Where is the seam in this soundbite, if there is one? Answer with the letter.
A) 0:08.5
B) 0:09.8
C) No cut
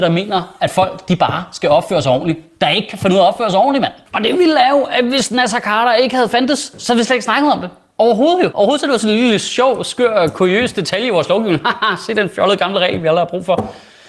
A